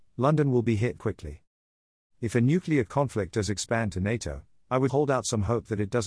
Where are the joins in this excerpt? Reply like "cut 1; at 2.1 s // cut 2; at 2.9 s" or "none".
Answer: cut 1; at 1.0 s // cut 2; at 4.9 s